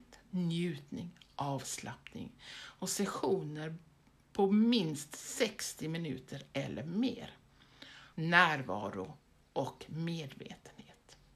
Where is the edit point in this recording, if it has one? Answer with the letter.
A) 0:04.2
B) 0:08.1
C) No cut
B